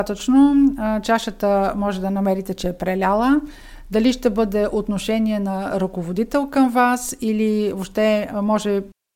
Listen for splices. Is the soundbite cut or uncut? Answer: uncut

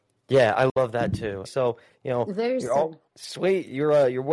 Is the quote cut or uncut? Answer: cut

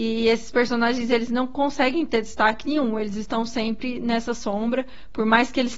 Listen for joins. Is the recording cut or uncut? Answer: uncut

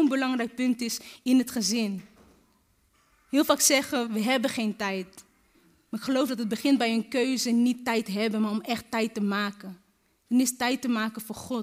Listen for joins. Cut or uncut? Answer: cut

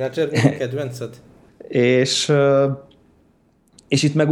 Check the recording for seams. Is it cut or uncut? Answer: cut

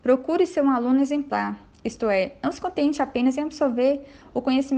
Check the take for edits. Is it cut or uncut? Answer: uncut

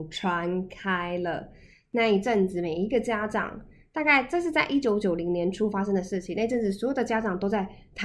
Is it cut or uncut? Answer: uncut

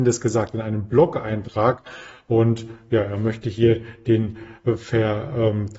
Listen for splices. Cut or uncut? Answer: uncut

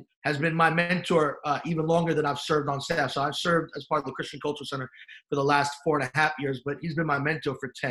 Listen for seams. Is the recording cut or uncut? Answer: uncut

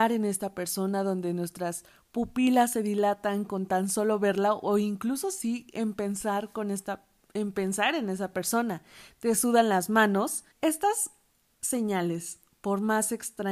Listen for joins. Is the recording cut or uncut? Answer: cut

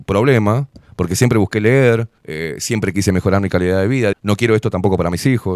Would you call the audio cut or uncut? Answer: cut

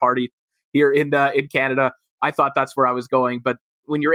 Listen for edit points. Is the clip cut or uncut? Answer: uncut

